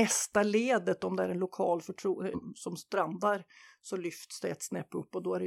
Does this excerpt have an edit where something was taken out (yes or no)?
yes